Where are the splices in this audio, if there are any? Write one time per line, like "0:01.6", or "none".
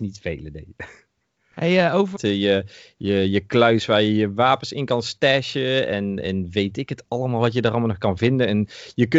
0:02.2